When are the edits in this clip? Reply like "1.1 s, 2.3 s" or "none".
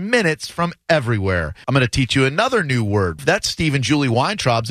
1.6 s, 3.2 s